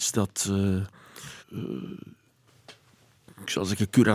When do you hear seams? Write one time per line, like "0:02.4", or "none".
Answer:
0:01.4